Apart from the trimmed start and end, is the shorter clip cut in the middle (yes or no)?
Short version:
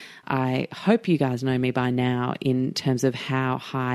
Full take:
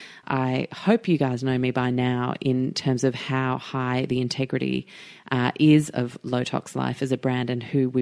no